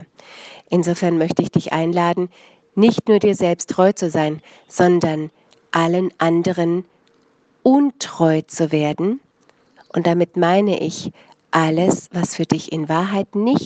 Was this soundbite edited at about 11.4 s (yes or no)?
no